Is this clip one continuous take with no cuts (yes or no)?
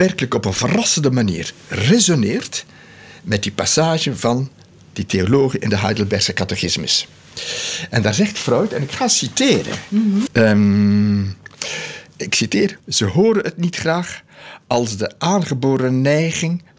no